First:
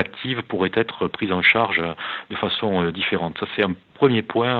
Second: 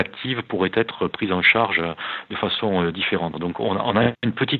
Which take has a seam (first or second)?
second